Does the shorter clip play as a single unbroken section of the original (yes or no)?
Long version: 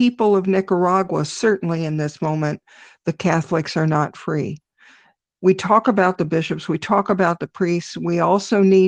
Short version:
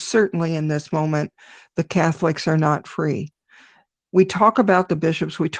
yes